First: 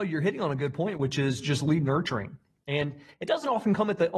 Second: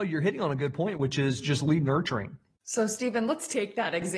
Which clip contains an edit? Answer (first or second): second